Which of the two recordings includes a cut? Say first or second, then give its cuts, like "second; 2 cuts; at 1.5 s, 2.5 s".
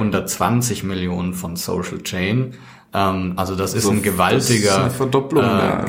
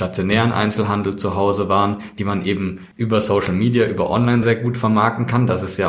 second; 2 cuts; at 2.9 s, 4.4 s